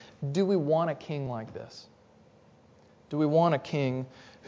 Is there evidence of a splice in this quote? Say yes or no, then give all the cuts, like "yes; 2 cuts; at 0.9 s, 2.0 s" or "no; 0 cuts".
no; 0 cuts